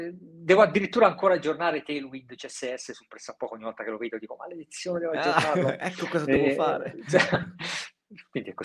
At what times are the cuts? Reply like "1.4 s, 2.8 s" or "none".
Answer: none